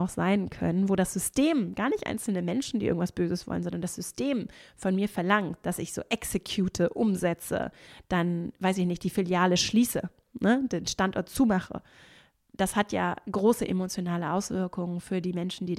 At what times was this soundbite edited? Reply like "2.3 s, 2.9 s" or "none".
none